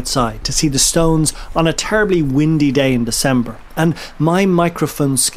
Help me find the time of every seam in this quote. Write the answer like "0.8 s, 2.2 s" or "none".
none